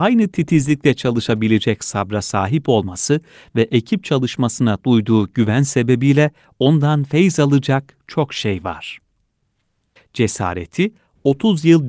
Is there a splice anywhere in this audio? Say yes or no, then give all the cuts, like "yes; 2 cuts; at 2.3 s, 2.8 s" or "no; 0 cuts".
yes; 1 cut; at 10.0 s